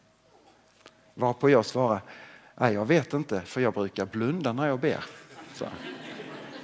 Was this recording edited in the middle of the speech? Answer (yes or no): no